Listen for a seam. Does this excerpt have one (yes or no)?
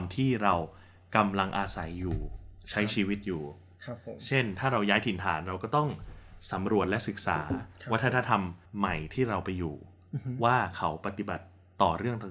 yes